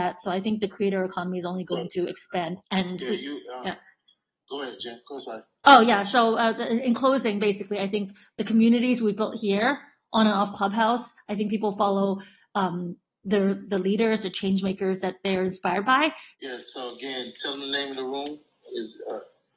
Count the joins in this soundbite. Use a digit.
3